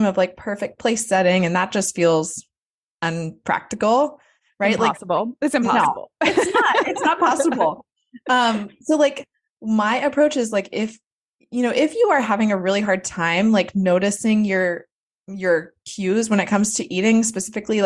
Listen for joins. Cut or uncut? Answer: uncut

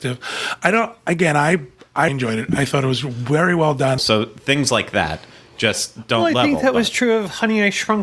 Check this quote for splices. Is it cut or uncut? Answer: cut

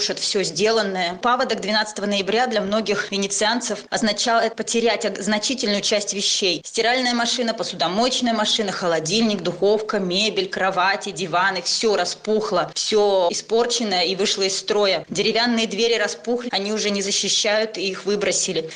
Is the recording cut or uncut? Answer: cut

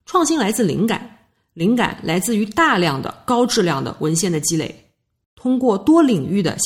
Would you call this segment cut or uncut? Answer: uncut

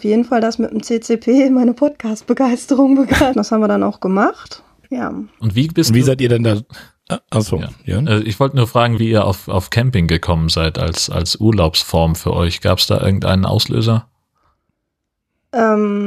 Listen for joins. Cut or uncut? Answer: cut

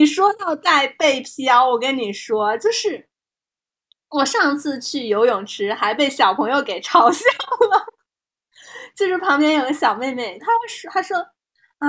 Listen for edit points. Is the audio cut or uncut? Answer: cut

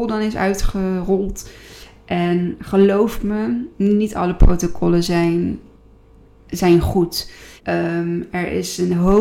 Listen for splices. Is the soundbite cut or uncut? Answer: cut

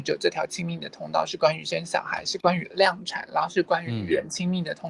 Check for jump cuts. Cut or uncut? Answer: uncut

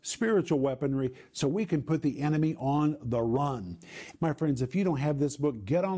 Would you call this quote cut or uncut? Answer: cut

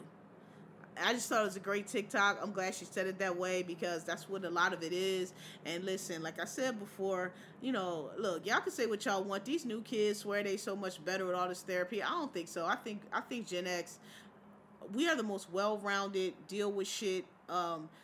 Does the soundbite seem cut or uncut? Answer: uncut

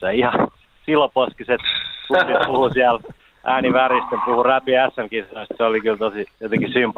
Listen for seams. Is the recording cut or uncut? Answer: uncut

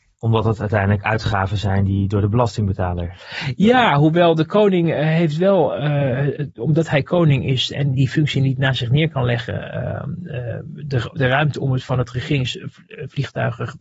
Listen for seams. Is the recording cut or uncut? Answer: cut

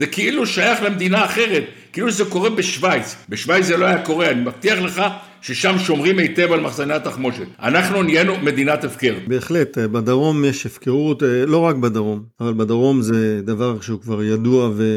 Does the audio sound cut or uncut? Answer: uncut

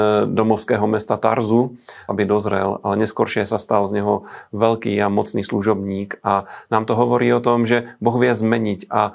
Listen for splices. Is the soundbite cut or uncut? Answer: cut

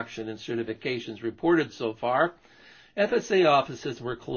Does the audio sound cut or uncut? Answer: uncut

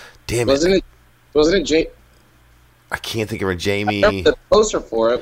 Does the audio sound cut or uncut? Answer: uncut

